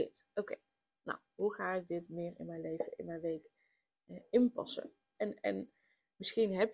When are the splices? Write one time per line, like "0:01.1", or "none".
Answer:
0:05.2